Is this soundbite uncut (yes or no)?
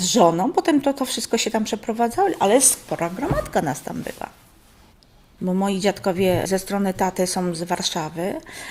yes